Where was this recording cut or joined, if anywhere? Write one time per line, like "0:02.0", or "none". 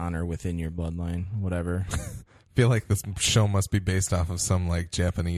none